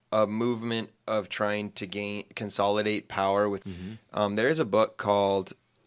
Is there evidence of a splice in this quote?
yes; 1 cut; at 3.6 s

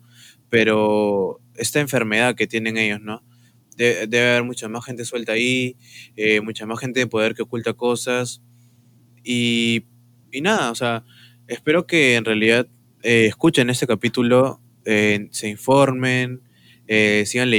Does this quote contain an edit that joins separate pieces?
no; 0 cuts

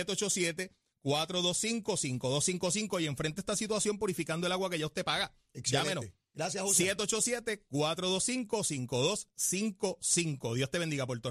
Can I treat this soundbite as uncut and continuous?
yes; 0 cuts

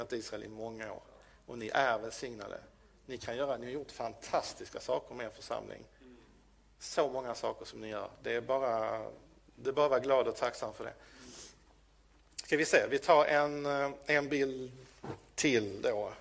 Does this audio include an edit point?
no; 0 cuts

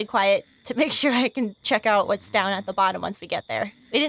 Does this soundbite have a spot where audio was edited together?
no; 0 cuts

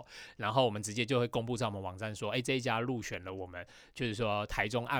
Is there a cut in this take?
no; 0 cuts

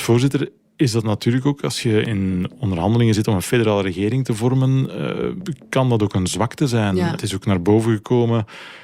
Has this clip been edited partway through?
no; 0 cuts

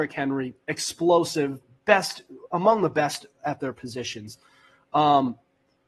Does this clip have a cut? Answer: no; 0 cuts

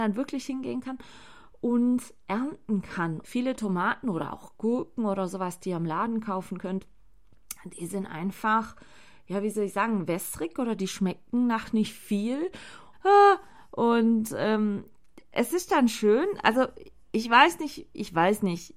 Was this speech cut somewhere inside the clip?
yes; 2 cuts; at 3.2 s, 12.9 s

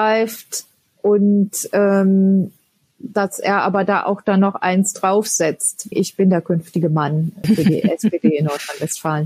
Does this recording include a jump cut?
yes; 2 cuts; at 5.9 s, 7.4 s

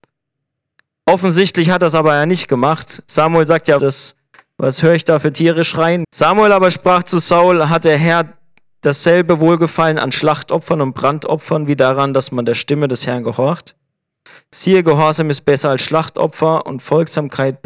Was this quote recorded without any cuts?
no; 2 cuts; at 3.8 s, 6.0 s

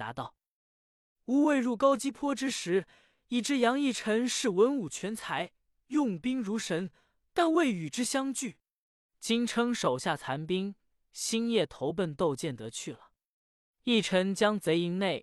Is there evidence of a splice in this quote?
yes; 1 cut; at 9.1 s

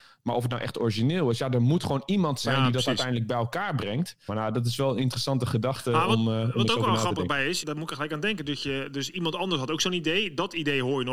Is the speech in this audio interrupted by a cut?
yes; 2 cuts; at 4.3 s, 7.6 s

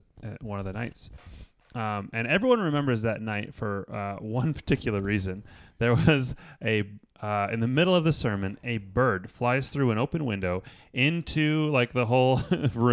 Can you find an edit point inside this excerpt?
no; 0 cuts

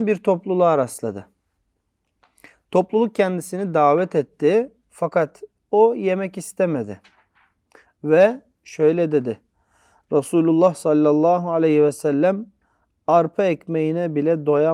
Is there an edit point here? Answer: no; 0 cuts

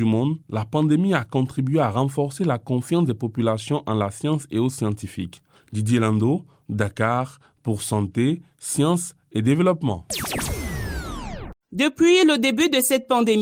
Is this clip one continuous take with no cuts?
yes; 0 cuts

